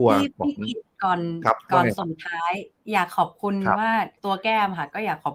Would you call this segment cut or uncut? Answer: cut